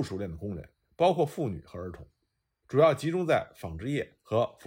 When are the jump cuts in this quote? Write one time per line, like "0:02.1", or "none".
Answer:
0:02.6